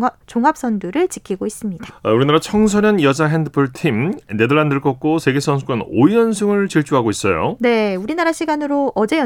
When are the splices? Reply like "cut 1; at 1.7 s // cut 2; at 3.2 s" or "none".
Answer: cut 1; at 1.9 s